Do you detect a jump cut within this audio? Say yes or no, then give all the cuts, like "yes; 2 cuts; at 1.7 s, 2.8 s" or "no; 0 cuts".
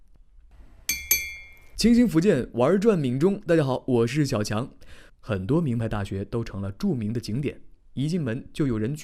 yes; 2 cuts; at 5.1 s, 7.8 s